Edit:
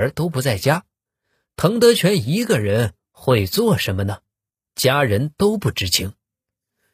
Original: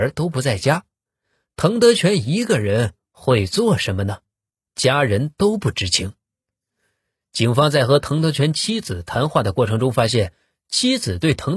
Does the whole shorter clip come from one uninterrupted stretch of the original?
yes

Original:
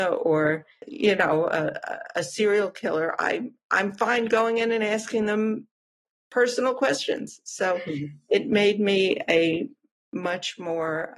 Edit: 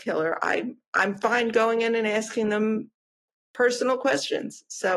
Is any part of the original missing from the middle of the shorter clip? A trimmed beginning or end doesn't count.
no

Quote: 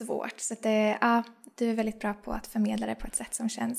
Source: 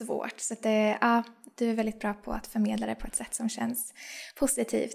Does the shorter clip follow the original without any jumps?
yes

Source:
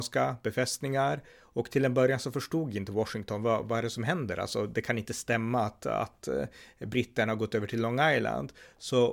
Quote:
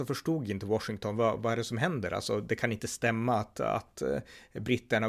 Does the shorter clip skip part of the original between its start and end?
no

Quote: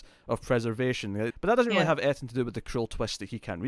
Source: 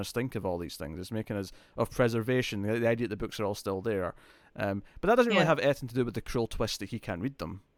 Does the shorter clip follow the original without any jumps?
no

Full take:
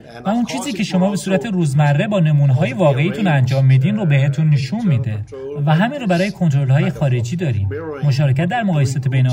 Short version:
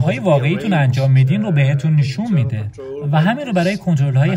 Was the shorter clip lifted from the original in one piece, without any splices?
yes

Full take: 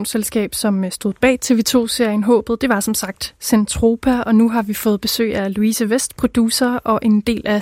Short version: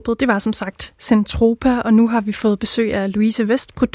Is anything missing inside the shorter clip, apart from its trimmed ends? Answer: no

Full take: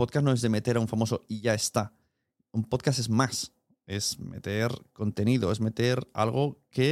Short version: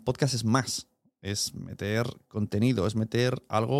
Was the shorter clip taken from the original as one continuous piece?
yes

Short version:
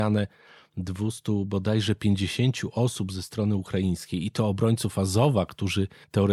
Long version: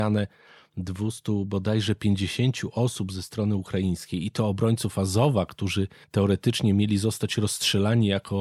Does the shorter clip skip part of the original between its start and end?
no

